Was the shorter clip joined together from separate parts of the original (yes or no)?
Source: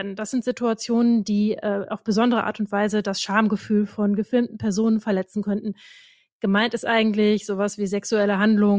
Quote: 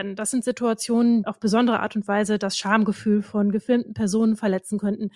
yes